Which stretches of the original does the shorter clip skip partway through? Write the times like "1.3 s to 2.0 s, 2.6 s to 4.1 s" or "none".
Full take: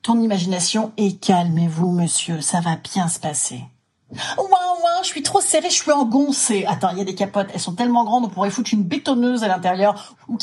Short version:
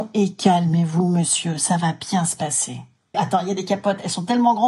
4.0 s to 6.6 s